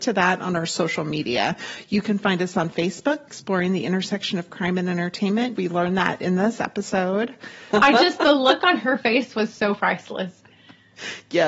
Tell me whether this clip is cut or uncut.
cut